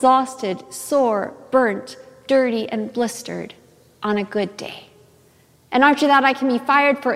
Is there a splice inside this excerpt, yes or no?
no